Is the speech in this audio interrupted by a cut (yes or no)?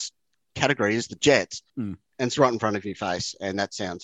yes